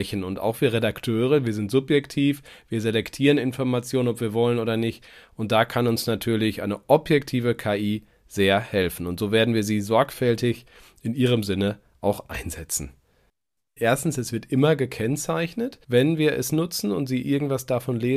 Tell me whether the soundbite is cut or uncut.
cut